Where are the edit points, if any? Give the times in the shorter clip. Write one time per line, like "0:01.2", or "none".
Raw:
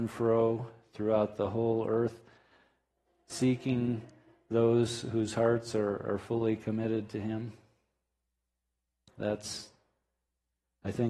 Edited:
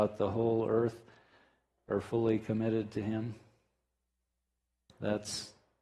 0:01.9